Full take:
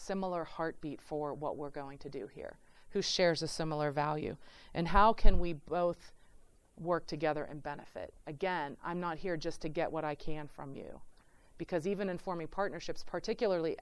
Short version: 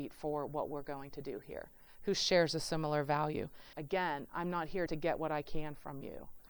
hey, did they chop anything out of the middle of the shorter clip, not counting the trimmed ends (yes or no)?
yes